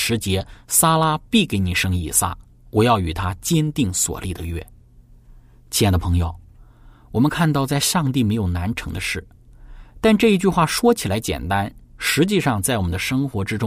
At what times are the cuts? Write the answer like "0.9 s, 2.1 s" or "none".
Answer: none